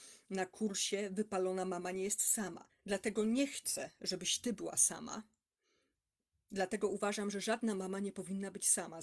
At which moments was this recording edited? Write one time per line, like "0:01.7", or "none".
0:02.7